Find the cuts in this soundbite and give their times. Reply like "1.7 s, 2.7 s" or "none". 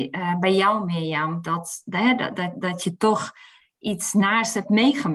none

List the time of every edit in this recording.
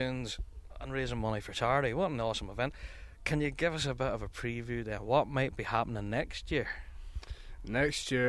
none

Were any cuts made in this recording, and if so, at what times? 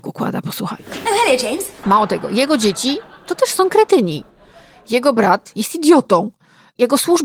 1.8 s

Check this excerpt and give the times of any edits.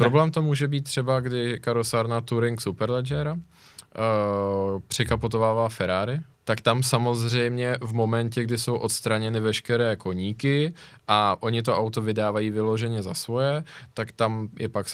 6.3 s

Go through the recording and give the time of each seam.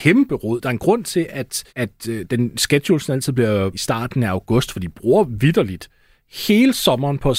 1.7 s, 3.7 s

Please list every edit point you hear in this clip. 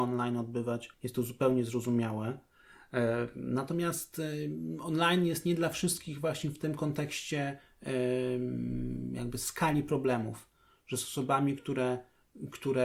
0.9 s

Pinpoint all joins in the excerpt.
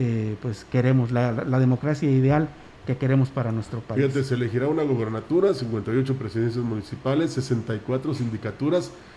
none

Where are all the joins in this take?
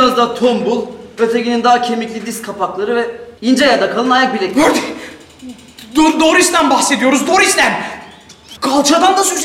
3.4 s, 8.6 s

